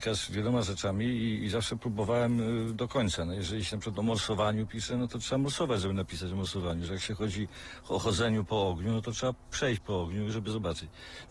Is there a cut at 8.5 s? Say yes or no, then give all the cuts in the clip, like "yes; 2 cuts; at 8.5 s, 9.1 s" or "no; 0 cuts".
yes; 1 cut; at 8.5 s